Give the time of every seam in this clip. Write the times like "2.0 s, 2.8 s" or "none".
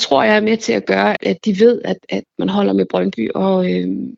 1.2 s